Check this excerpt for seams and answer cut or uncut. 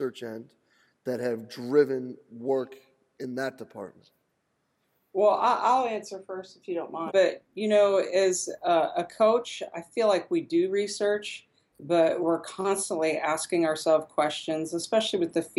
cut